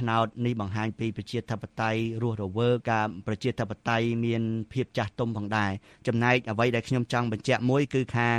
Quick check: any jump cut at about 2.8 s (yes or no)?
yes